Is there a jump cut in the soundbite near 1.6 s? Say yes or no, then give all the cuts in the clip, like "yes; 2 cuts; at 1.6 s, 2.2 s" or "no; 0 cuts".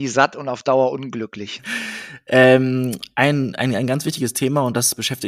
yes; 1 cut; at 1.6 s